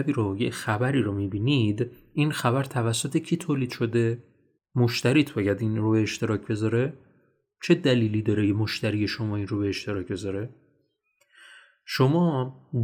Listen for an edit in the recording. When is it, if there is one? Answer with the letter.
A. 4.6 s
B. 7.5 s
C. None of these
A